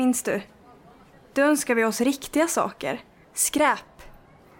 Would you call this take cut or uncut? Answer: cut